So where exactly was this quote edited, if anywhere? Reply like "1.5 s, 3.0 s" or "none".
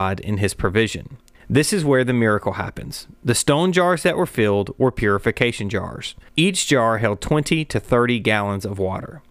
1.4 s, 6.3 s